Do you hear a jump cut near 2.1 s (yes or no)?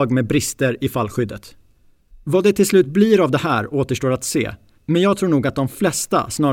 yes